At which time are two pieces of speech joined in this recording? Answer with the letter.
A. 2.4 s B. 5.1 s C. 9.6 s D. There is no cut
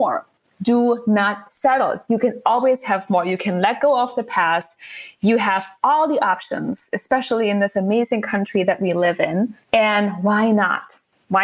C